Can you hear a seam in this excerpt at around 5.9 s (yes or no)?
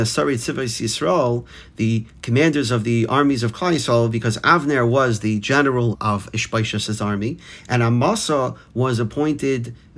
yes